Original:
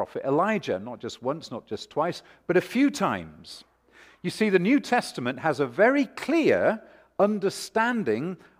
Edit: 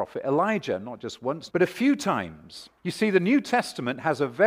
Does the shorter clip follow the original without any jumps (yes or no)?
no